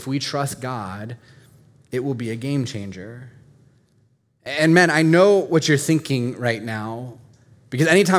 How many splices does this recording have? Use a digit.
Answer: 0